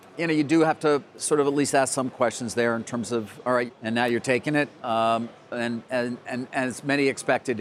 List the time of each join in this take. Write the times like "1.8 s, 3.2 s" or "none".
3.7 s, 4.8 s